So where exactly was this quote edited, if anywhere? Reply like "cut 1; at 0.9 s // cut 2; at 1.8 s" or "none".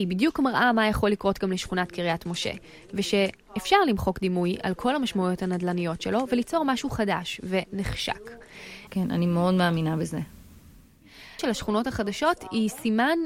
cut 1; at 8.9 s // cut 2; at 11.4 s